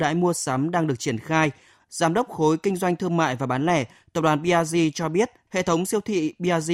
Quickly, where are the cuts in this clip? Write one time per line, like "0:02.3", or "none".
0:01.8
0:05.5